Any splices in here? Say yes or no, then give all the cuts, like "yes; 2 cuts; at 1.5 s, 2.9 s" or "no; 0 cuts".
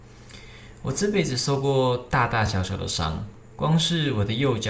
no; 0 cuts